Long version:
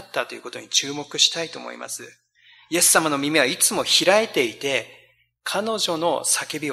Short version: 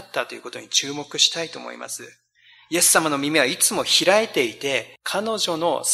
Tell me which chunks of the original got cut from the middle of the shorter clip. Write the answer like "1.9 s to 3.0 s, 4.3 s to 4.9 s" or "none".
5.0 s to 5.4 s